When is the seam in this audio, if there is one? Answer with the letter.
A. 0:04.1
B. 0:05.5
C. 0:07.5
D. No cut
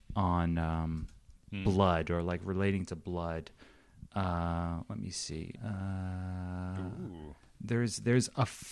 B